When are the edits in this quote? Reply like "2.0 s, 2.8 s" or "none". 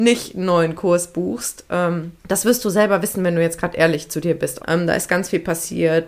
2.2 s, 4.6 s